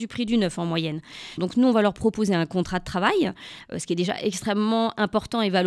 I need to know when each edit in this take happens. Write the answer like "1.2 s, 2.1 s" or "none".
1.4 s

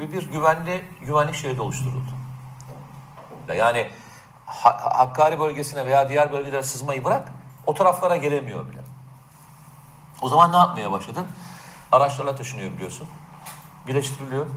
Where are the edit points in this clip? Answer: 3.5 s, 11.9 s

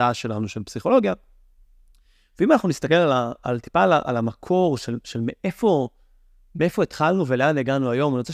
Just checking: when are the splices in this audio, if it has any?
none

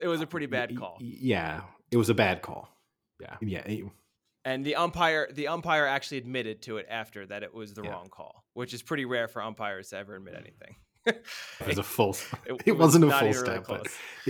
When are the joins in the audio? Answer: 3.4 s, 8.5 s, 11.6 s

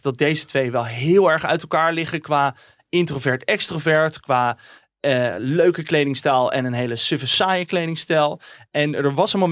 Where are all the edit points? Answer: none

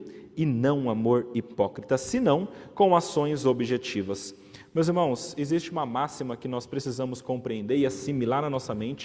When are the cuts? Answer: none

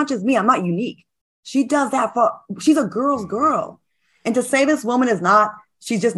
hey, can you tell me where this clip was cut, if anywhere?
none

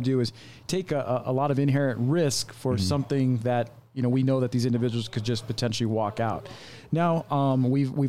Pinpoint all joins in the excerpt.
none

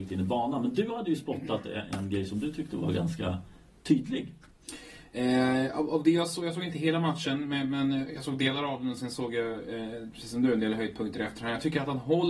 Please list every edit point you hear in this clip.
none

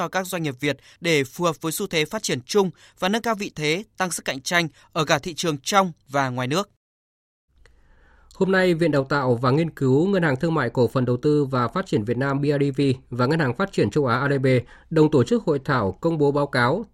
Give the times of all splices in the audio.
none

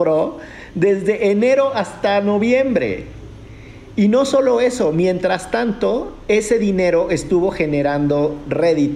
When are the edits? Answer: none

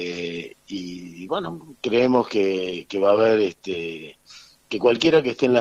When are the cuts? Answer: none

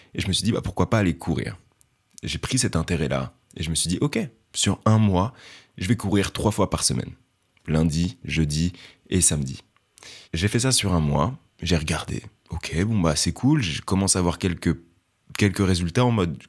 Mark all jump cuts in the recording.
10.2 s

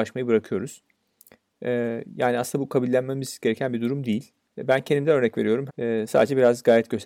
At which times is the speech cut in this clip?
4.4 s, 5.7 s

